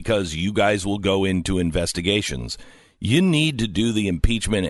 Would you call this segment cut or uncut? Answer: uncut